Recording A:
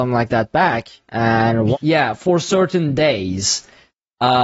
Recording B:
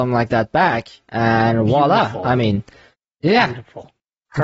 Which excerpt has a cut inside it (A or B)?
A